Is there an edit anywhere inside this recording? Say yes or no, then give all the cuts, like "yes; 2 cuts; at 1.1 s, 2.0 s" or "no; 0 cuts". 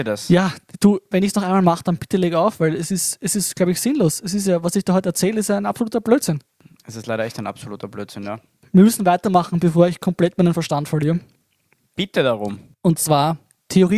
no; 0 cuts